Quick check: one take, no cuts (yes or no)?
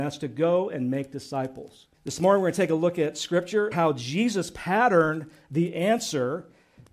no